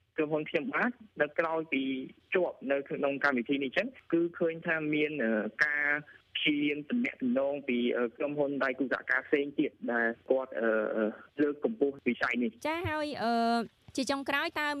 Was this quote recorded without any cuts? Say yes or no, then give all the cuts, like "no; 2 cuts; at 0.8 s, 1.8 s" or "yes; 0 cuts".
no; 2 cuts; at 1.3 s, 12.6 s